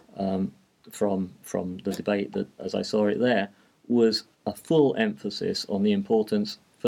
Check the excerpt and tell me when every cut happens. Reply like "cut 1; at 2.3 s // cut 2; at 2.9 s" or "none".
cut 1; at 2.6 s // cut 2; at 4.3 s